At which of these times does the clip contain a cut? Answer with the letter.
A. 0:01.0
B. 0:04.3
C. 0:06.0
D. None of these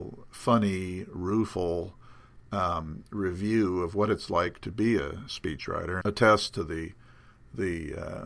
C